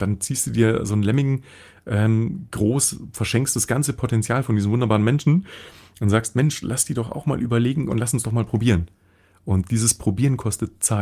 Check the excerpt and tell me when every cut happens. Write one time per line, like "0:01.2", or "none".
none